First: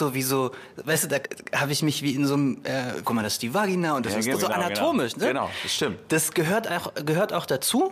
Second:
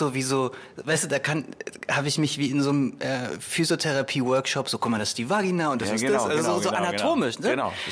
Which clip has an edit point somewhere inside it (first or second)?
first